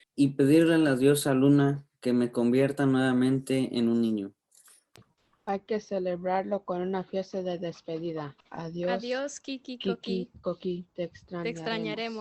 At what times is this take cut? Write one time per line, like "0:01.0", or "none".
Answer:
0:08.4